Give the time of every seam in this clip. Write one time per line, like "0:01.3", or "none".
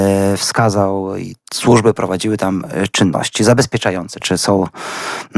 0:01.4
0:04.2